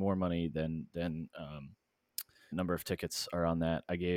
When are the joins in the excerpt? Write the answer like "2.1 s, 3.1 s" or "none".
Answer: 2.5 s